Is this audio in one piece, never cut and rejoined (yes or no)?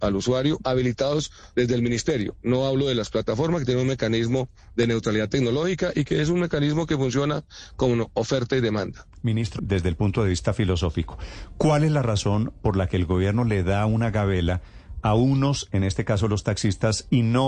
no